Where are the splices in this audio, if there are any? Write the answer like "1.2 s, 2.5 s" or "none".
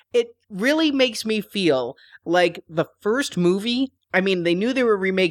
none